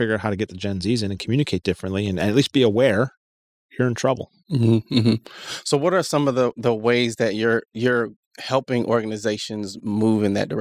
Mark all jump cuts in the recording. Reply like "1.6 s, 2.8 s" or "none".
none